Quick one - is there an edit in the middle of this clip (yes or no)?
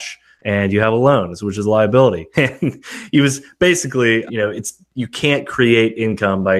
yes